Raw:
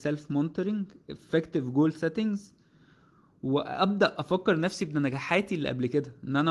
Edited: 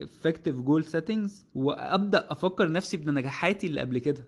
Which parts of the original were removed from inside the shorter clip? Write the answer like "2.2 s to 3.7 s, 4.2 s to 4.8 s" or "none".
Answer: 2.6 s to 3.4 s